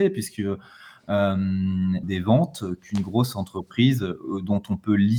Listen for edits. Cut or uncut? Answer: cut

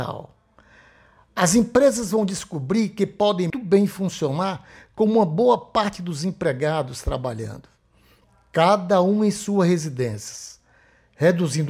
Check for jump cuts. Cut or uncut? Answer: cut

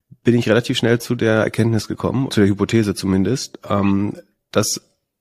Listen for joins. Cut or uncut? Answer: cut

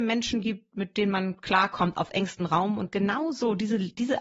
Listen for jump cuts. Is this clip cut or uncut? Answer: uncut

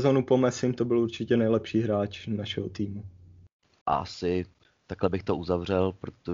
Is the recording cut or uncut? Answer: cut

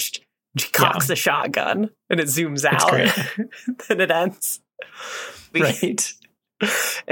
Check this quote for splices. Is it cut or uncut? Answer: cut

